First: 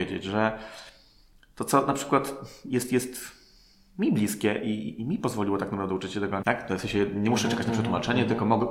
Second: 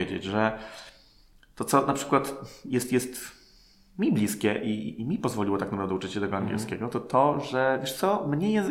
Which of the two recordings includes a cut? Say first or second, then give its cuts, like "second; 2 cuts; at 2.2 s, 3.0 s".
first; 1 cut; at 6.4 s